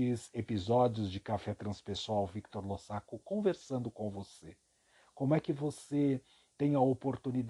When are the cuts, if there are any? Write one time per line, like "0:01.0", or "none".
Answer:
none